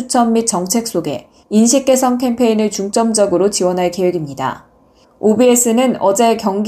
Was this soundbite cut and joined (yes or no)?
yes